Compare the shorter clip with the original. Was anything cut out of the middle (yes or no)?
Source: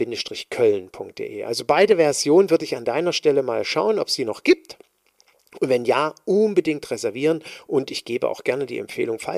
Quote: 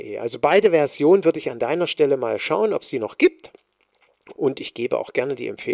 yes